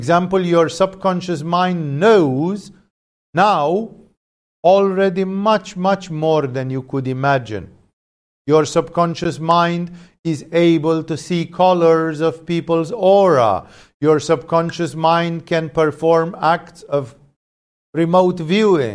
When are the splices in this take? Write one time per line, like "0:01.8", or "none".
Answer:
none